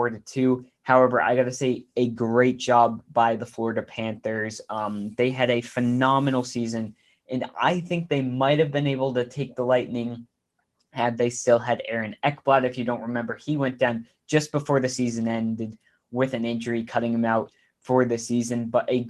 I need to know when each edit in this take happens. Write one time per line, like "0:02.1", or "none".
none

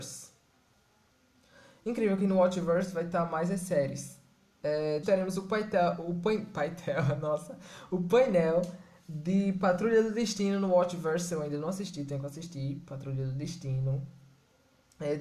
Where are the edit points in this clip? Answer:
0:05.0

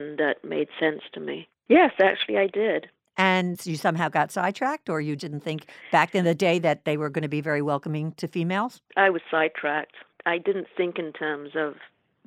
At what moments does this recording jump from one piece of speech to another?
0:01.5
0:05.2
0:08.9

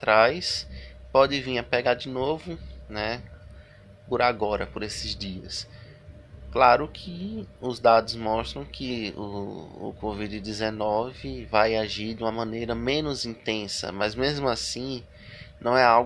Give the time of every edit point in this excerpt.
none

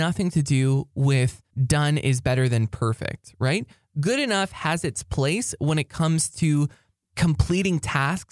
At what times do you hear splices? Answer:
none

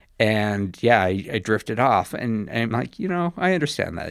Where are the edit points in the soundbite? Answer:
none

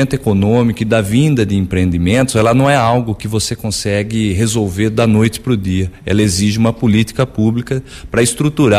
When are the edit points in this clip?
none

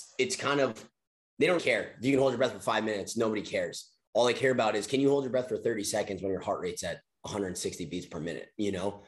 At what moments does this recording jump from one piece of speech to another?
0:01.6

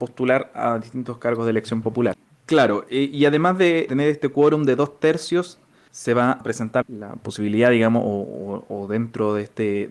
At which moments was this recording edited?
0:02.1
0:03.9
0:06.8

